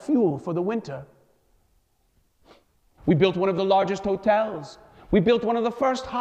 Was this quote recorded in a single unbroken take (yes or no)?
no